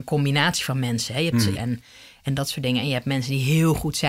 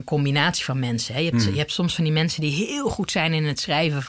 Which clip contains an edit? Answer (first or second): first